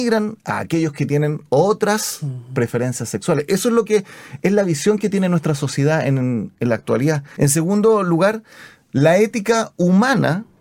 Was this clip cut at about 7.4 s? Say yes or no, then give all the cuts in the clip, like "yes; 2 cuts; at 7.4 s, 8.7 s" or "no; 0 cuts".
yes; 1 cut; at 7.4 s